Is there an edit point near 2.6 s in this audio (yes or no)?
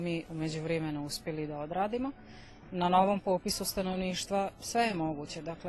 no